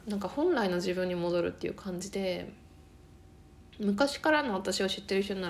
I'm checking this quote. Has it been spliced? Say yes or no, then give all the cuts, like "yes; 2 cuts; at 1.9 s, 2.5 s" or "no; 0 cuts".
no; 0 cuts